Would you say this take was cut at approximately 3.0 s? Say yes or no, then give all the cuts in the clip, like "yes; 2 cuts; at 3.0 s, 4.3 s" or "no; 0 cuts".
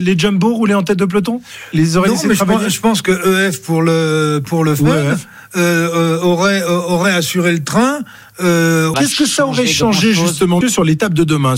no; 2 cuts; at 8.9 s, 10.6 s